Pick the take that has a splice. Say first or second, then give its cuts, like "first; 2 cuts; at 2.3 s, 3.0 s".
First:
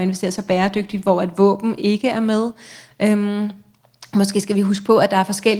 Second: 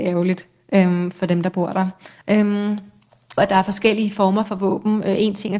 second; 2 cuts; at 2.2 s, 3.4 s